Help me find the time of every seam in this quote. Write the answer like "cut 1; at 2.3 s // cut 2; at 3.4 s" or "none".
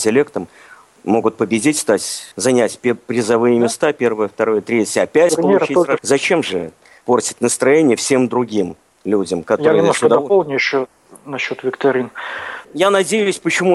cut 1; at 2.3 s // cut 2; at 6.0 s // cut 3; at 12.6 s